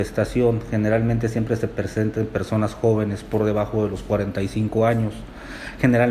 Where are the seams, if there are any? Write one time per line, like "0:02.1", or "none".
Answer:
none

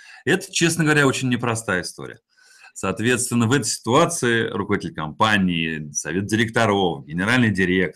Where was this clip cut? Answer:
none

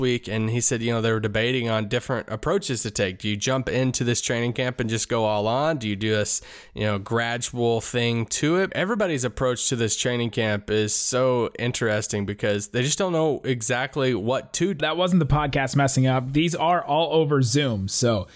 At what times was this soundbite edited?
0:08.7
0:14.8

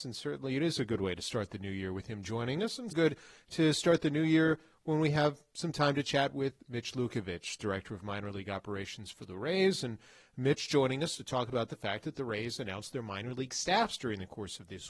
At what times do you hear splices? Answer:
0:02.9

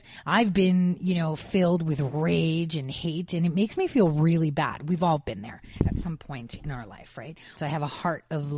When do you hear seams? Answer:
0:07.6

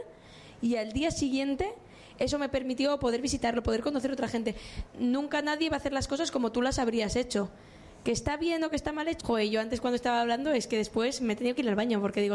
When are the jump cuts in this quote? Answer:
0:04.9
0:09.2

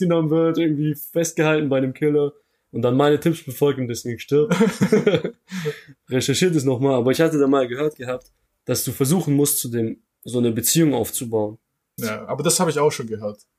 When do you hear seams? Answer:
0:12.0

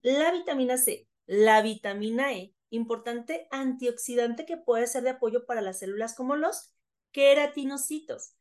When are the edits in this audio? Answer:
0:01.2

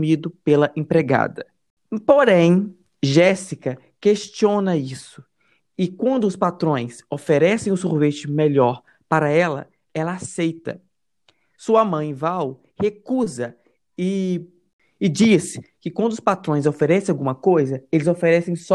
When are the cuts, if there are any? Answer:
none

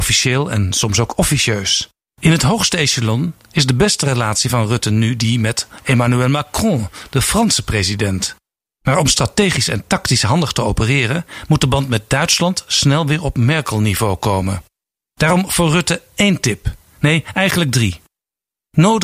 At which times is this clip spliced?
0:02.1

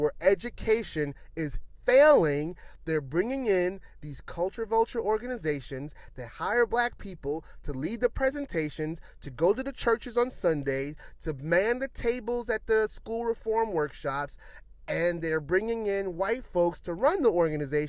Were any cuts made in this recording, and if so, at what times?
none

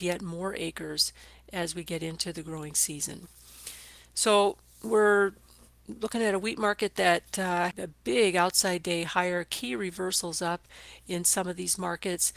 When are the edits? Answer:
0:07.7

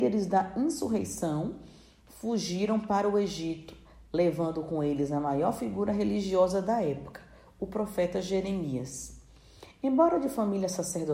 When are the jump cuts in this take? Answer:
none

